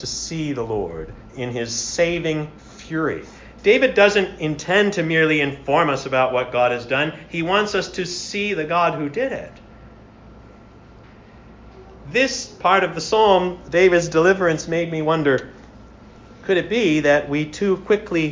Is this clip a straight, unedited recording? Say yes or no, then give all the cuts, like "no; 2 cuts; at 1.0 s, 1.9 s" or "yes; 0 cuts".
yes; 0 cuts